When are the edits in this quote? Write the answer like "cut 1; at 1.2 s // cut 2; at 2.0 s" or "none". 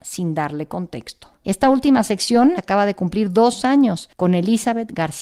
cut 1; at 1.4 s // cut 2; at 2.6 s